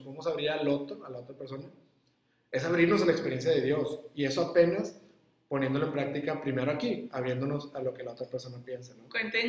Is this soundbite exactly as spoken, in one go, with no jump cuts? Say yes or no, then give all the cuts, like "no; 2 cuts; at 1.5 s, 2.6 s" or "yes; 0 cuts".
yes; 0 cuts